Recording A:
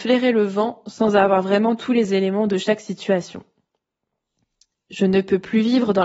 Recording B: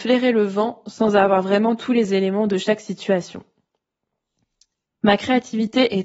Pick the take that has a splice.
B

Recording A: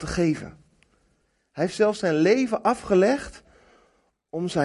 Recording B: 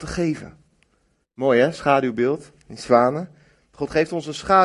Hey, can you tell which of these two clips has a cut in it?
B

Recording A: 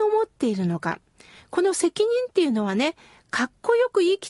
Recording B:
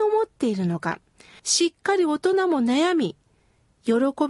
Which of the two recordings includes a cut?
B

